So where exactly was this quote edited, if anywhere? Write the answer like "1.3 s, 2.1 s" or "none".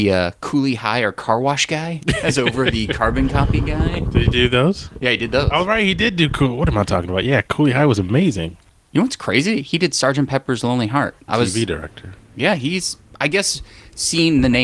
11.3 s